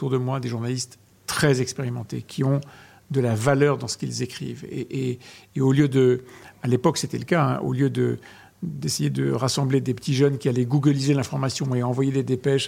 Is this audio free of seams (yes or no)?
yes